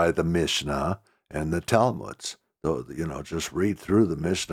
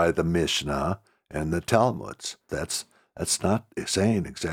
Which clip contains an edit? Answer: second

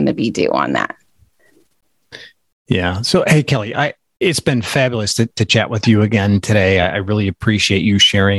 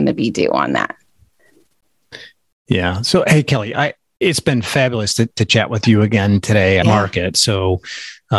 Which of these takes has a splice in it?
second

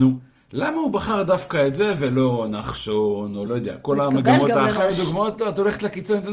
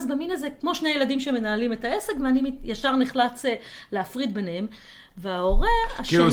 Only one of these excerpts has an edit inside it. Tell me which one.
first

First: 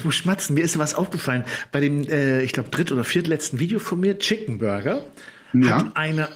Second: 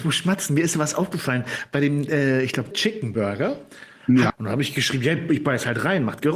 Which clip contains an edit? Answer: second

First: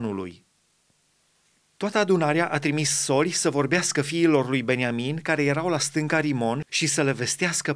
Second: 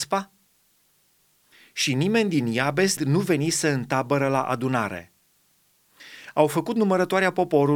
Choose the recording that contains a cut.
second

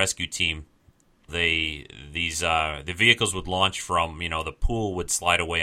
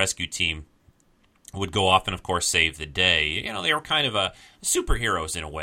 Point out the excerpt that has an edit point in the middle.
first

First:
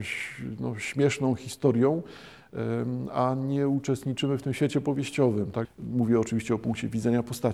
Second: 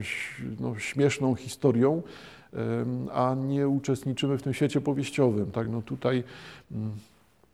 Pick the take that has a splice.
first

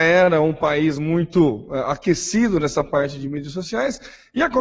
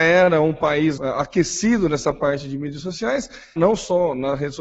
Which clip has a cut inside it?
second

